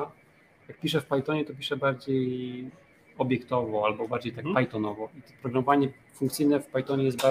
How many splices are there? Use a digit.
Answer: 1